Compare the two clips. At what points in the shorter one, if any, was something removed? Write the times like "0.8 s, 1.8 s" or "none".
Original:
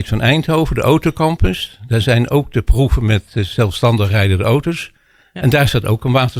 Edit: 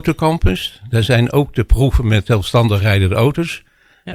2.3 s